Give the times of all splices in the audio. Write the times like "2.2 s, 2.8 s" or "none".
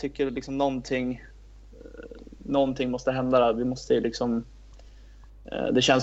none